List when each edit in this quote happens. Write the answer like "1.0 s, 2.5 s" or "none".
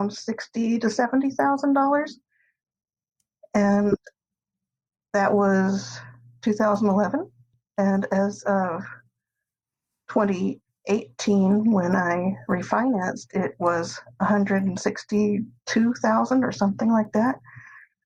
none